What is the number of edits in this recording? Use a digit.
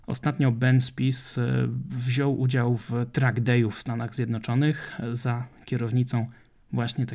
0